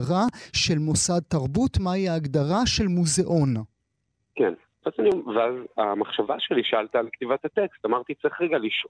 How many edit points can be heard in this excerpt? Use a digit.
1